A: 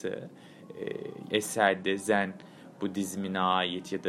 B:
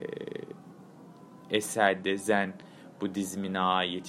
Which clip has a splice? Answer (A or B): A